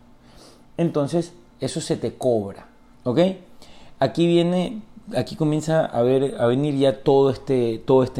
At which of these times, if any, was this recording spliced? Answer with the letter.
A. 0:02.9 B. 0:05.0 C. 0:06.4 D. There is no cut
A